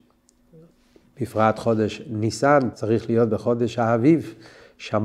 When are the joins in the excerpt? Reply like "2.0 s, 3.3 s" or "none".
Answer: 2.7 s